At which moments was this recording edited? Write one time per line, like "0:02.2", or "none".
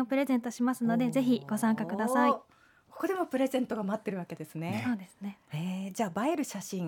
none

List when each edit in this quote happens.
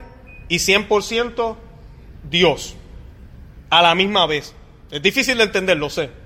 none

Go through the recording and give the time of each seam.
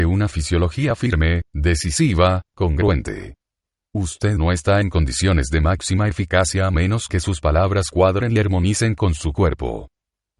none

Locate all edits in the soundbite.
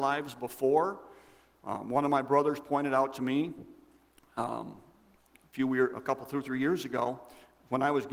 none

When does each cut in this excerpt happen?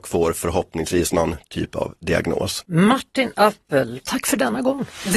0:04.0

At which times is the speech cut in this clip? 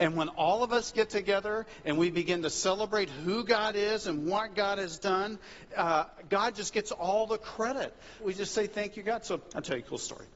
0:08.2

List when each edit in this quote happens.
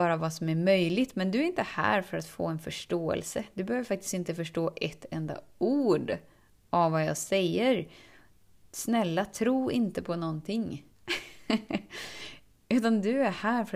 none

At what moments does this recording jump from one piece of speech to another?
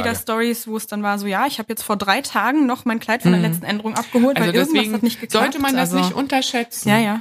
none

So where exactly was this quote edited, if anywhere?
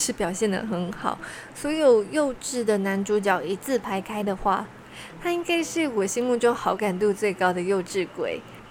none

